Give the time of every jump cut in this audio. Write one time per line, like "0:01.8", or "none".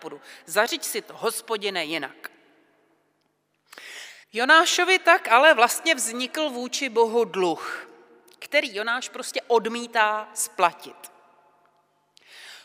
0:04.2